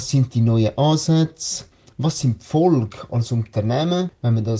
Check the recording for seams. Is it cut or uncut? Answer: uncut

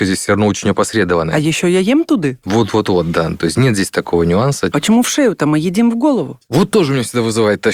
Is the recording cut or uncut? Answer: cut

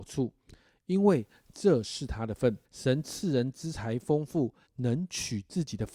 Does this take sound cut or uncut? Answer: cut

